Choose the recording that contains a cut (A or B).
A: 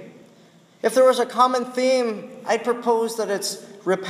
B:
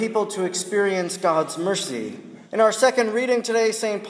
B